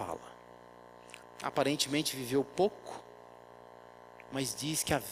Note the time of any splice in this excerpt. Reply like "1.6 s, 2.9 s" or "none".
1.2 s